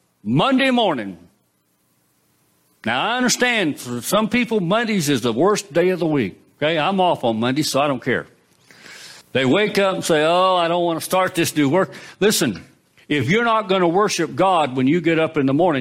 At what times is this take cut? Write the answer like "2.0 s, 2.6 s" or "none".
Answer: 9.2 s